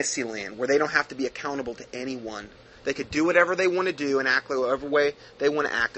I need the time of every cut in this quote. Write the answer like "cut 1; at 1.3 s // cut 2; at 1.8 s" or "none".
none